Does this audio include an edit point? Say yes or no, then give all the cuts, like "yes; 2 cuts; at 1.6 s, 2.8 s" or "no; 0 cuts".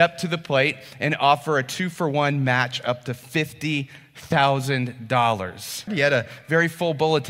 yes; 1 cut; at 5.9 s